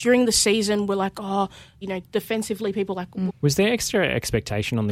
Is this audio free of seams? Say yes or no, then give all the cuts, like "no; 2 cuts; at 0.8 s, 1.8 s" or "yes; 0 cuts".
no; 2 cuts; at 1.8 s, 3.3 s